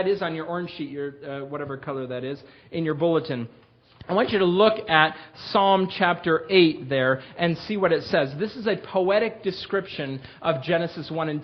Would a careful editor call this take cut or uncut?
uncut